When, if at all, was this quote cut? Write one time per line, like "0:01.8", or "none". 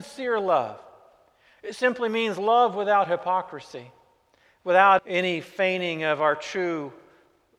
0:05.0